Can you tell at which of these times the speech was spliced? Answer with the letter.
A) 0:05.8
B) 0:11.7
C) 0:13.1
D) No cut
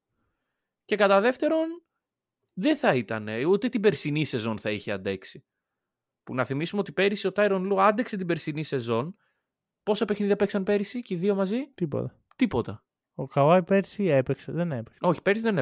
B